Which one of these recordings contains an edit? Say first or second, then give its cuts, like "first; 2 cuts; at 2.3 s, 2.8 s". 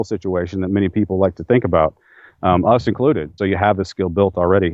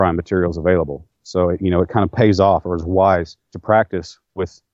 first; 1 cut; at 3.4 s